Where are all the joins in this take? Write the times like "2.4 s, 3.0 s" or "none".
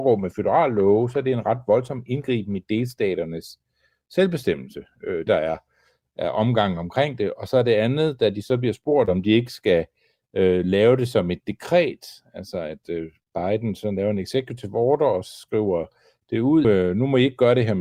5.3 s, 16.6 s